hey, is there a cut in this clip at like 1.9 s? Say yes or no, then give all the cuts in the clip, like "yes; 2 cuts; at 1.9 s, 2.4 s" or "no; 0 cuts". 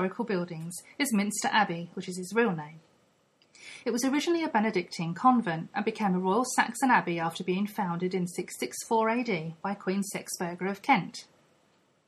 yes; 2 cuts; at 1.9 s, 3.8 s